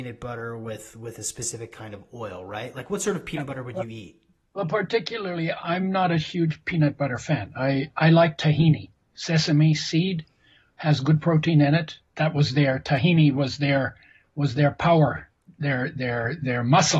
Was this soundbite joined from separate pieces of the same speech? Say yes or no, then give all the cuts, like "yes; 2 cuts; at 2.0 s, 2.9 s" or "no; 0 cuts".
yes; 1 cut; at 12.0 s